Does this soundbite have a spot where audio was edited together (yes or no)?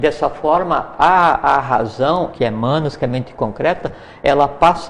yes